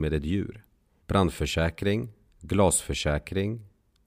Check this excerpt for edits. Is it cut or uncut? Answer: cut